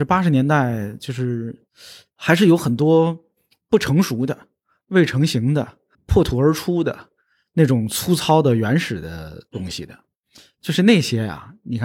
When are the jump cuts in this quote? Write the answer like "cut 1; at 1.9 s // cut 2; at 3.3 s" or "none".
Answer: cut 1; at 5.9 s